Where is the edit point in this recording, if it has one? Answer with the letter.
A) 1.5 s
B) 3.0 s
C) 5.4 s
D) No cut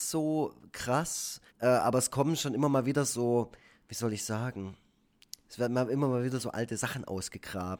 A